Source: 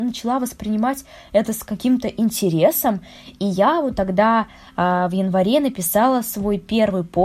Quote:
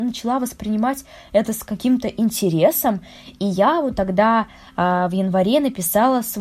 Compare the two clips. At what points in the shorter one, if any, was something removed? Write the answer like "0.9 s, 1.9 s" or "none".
none